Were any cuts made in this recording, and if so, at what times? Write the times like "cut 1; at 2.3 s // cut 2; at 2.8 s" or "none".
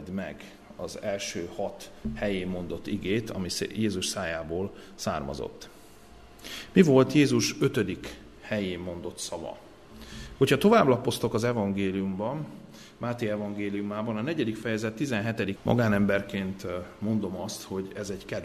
cut 1; at 10.4 s // cut 2; at 15.6 s